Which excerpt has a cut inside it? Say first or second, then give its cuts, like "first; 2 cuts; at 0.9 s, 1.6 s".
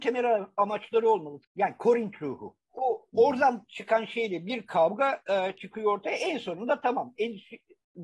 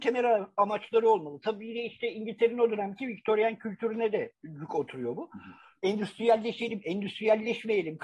first; 2 cuts; at 1.4 s, 2.7 s